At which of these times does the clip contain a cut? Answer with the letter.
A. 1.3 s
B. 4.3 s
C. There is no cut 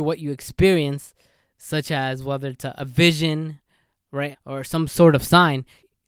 B